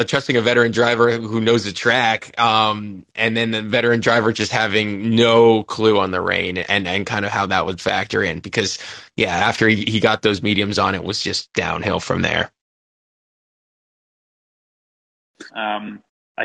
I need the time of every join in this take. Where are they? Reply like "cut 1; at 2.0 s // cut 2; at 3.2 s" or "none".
cut 1; at 15.5 s